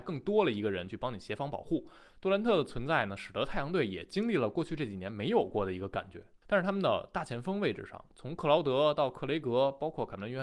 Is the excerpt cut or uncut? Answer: cut